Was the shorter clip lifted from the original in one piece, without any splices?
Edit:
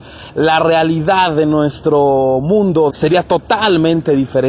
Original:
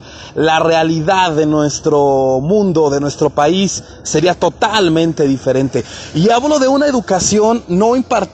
no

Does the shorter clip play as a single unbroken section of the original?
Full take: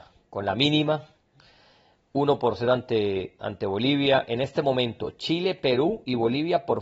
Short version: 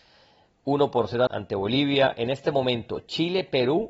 no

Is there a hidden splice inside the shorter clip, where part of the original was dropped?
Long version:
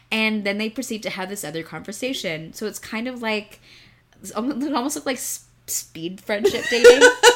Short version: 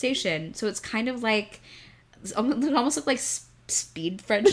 no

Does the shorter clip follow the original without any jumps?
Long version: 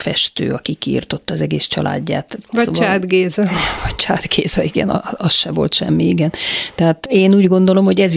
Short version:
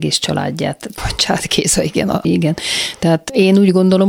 no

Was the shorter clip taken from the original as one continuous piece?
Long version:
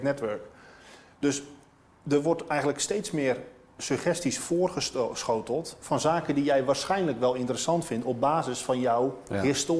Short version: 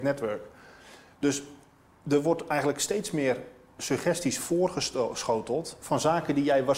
yes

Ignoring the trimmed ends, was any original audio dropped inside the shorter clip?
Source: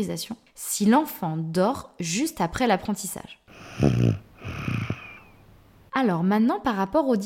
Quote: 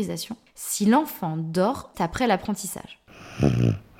yes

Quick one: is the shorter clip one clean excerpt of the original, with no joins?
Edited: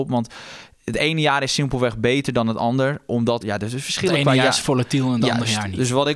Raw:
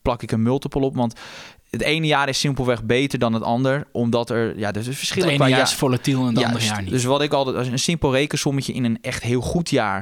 no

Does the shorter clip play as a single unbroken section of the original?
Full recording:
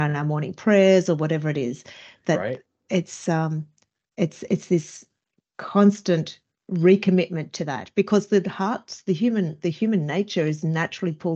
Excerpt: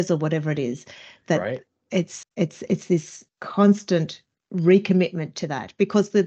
no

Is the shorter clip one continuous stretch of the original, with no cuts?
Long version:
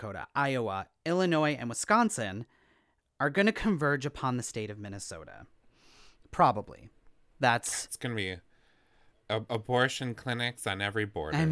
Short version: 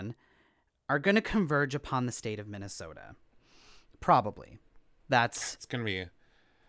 yes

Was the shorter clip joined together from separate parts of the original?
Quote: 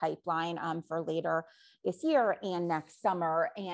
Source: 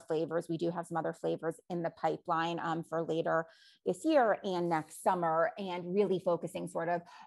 no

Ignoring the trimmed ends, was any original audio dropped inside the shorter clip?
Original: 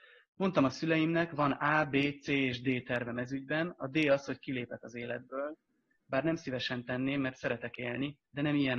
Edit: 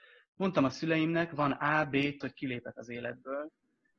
yes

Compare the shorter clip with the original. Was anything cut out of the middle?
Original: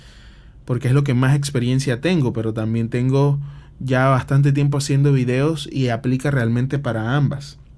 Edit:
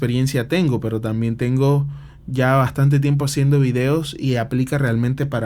no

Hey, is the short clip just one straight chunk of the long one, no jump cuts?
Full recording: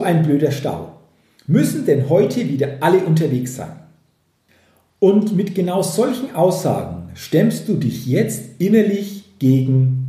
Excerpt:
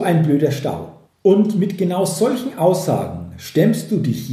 no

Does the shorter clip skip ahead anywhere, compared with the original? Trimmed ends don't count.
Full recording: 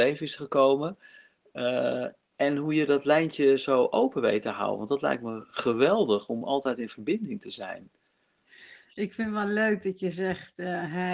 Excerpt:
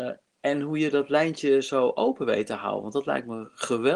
no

